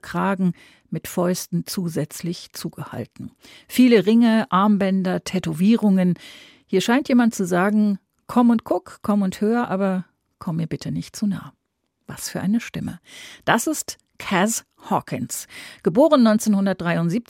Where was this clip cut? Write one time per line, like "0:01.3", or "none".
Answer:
none